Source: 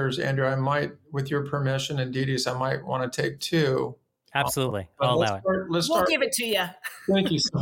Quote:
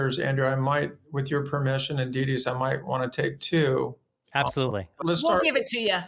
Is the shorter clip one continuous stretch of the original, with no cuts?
no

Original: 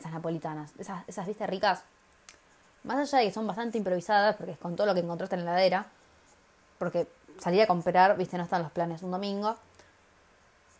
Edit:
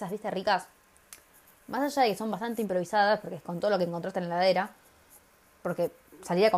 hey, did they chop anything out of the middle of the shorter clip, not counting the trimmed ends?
no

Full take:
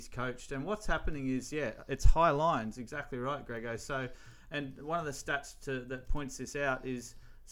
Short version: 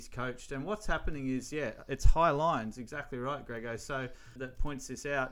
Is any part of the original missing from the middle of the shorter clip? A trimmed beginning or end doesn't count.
yes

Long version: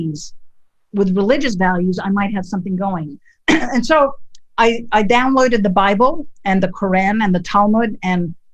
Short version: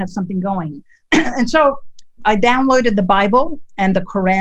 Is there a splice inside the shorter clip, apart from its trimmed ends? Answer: yes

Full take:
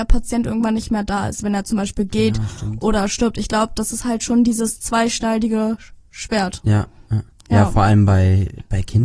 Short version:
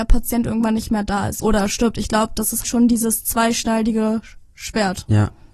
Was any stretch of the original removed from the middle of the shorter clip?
yes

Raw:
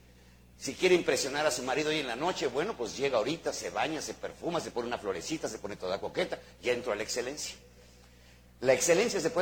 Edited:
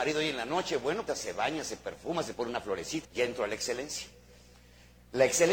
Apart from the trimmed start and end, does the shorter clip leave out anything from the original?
yes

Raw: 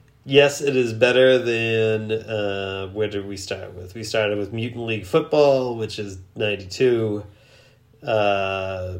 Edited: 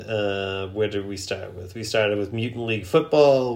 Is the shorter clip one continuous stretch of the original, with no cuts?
yes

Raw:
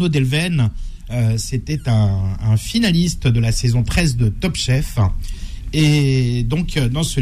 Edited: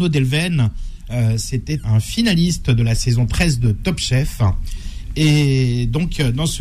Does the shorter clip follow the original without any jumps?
no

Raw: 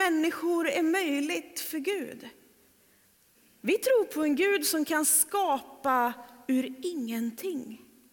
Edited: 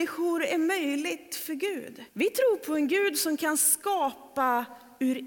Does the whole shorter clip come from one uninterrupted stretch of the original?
no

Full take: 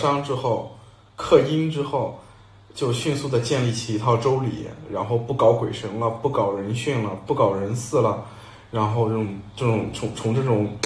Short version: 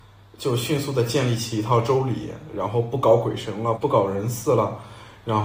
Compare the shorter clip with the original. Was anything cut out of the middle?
yes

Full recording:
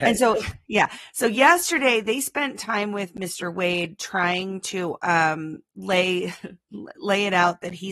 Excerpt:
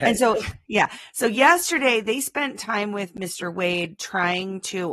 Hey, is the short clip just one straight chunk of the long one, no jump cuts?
yes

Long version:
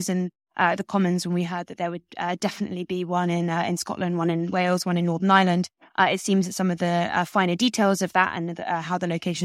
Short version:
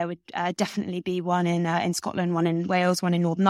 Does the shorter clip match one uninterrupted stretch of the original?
yes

